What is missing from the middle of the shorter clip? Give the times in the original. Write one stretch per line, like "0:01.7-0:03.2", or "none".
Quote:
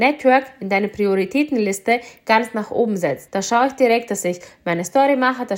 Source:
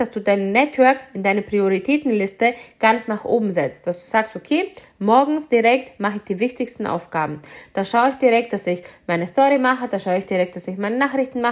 0:03.8-0:07.7